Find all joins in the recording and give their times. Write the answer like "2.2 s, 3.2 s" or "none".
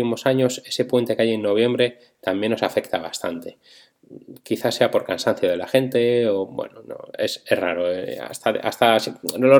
none